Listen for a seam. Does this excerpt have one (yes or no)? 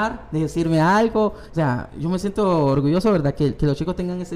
yes